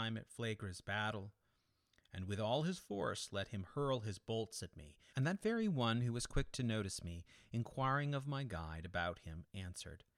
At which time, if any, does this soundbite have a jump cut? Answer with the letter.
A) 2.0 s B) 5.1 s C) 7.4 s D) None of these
B